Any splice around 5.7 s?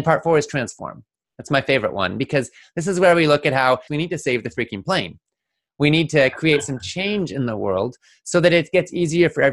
no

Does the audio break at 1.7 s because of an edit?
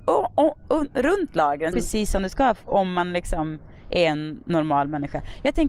yes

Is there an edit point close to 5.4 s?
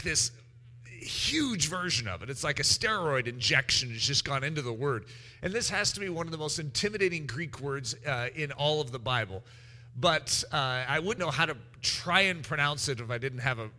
no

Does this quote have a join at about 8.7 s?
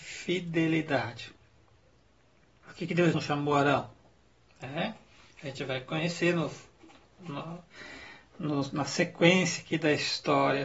no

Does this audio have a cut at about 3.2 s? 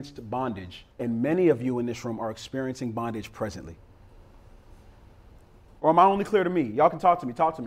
no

